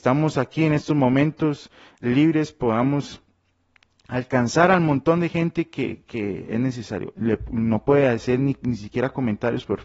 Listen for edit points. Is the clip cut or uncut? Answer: cut